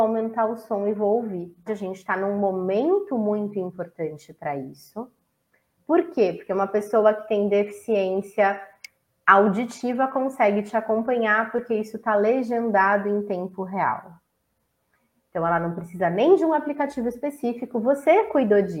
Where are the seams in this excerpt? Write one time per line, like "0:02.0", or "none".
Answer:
0:01.7

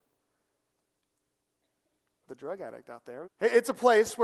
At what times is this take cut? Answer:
0:03.2

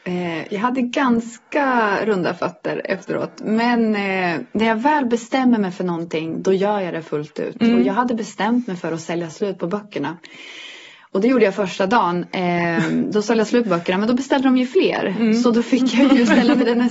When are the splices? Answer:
none

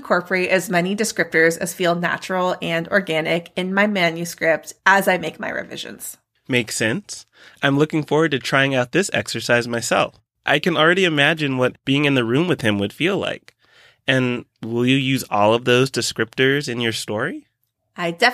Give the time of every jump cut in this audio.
0:10.3

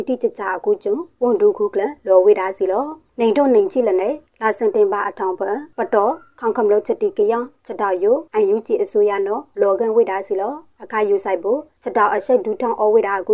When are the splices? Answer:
none

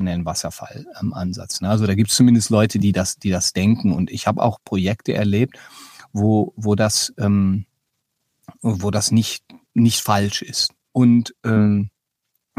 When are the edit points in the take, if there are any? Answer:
0:10.9

